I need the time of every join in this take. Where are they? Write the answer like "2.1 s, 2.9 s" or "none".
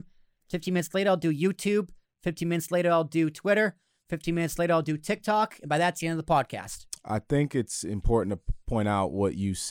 none